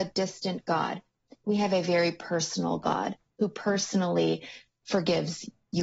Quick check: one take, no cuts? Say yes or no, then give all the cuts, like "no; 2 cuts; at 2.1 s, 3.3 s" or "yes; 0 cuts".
yes; 0 cuts